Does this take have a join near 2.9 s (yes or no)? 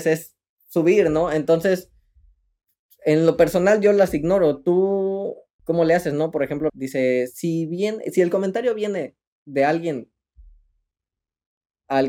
no